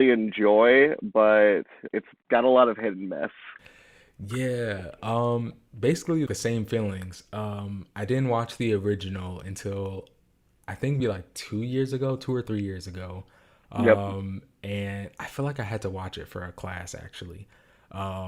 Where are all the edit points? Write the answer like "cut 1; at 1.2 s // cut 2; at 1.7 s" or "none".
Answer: cut 1; at 1.9 s // cut 2; at 6.3 s // cut 3; at 11.0 s